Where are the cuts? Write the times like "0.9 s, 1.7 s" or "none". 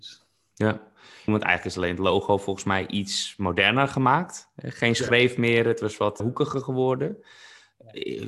1.3 s, 6.2 s